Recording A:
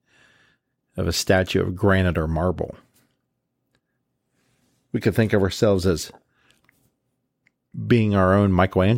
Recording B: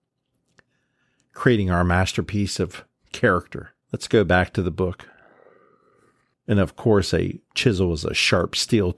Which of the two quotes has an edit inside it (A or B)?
B